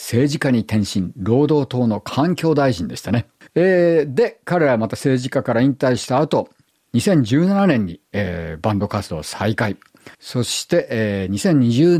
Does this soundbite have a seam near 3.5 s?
yes; 2 cuts; at 3.5 s, 10.1 s

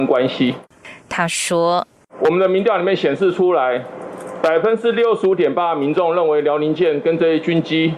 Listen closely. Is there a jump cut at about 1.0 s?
yes; 1 cut; at 1.0 s

